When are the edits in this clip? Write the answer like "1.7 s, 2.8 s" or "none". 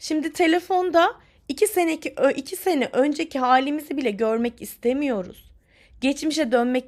none